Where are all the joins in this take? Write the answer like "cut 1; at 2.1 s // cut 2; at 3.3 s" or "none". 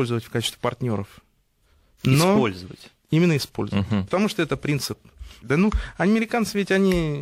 cut 1; at 5.4 s